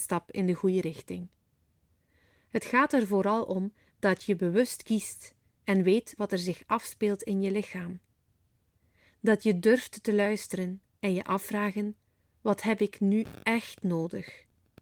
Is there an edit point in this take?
no; 0 cuts

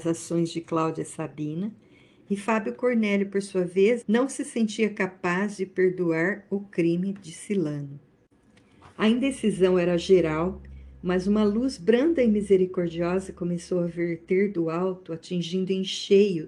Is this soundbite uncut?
no; 1 cut; at 4.0 s

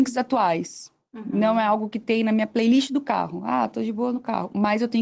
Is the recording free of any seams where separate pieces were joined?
yes; 0 cuts

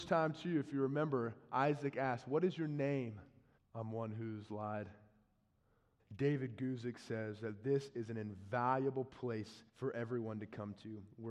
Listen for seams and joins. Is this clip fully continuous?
no; 3 cuts; at 3.6 s, 6.0 s, 9.7 s

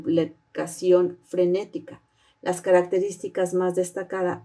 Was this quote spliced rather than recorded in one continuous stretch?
no; 0 cuts

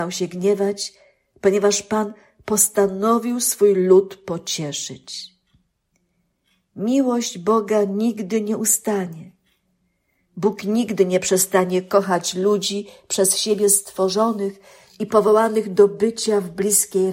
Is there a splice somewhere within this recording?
no; 0 cuts

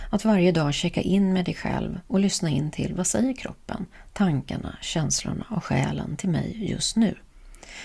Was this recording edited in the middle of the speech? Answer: no; 0 cuts

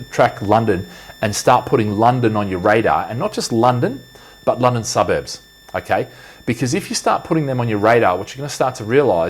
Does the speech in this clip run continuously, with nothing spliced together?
yes; 0 cuts

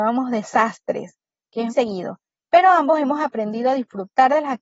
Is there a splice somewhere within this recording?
yes; 1 cut; at 1.7 s

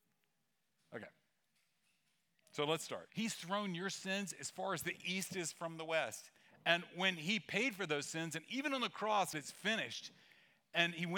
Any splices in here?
yes; 3 cuts; at 3.1 s, 6.5 s, 9.3 s

